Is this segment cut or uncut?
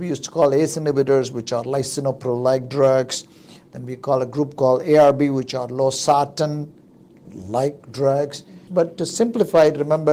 cut